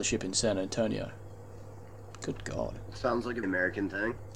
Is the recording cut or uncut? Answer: cut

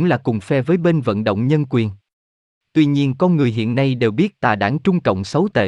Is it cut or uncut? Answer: cut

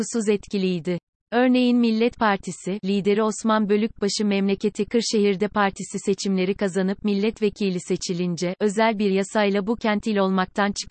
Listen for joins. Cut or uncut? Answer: cut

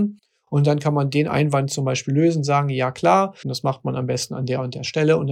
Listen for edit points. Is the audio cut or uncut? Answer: cut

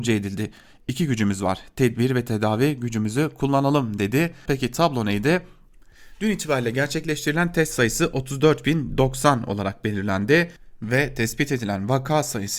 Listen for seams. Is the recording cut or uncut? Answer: cut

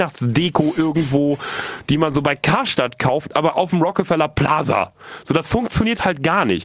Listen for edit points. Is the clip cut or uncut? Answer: uncut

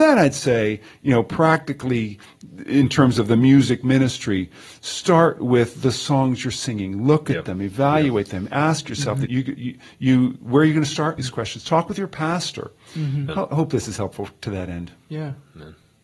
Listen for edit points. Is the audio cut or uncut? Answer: cut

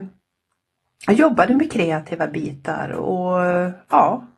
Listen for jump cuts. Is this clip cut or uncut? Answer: uncut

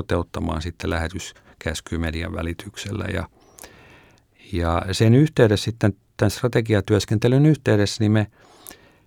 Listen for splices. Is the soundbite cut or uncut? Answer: uncut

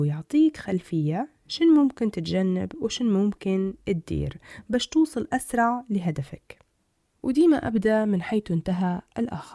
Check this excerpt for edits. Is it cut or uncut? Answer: uncut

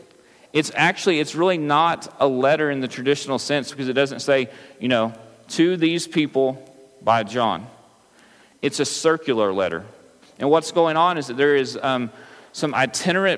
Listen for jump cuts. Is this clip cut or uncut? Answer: cut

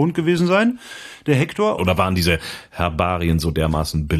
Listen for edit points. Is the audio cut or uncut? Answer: cut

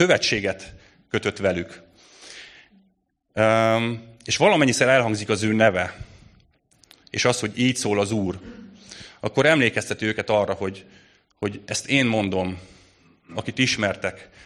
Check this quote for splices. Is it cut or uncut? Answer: uncut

